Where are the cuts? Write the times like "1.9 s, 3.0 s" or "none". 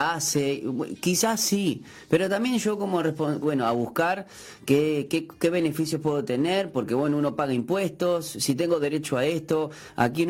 3.4 s